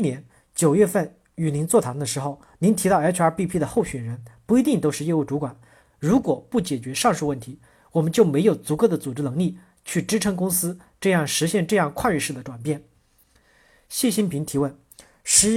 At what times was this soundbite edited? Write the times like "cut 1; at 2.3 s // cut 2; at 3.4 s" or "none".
cut 1; at 5.8 s